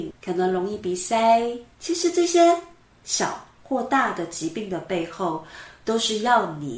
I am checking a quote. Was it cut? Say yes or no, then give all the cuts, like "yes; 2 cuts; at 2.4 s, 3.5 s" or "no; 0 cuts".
yes; 1 cut; at 1.7 s